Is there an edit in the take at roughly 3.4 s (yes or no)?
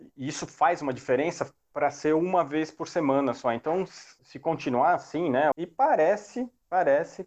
no